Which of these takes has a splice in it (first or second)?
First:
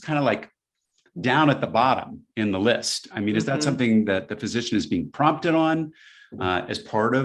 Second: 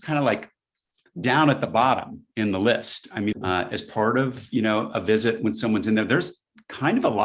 second